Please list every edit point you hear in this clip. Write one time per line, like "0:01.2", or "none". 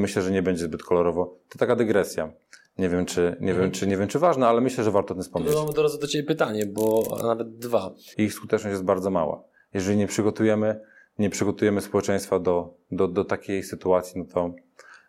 0:08.1